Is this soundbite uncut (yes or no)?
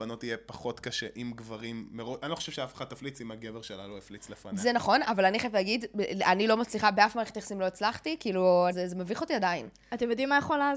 no